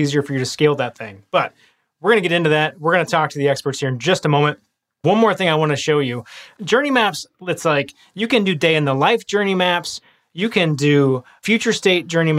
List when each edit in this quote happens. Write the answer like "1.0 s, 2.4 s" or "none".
none